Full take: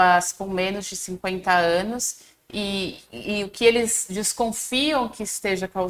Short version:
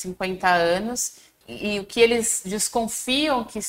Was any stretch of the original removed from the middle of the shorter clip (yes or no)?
yes